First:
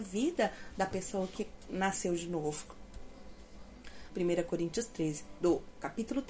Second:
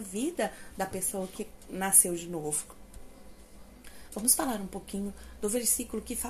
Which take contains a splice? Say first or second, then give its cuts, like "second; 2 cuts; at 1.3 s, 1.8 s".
first; 2 cuts; at 4.1 s, 5.4 s